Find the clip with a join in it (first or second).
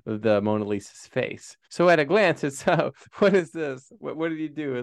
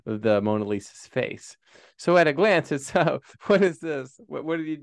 first